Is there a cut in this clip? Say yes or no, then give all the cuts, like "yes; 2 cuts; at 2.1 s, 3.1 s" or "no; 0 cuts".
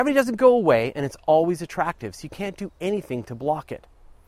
no; 0 cuts